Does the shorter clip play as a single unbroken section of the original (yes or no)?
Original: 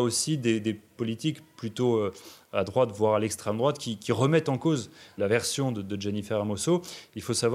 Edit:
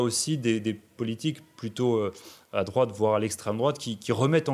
yes